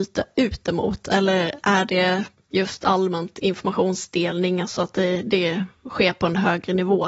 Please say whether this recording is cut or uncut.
uncut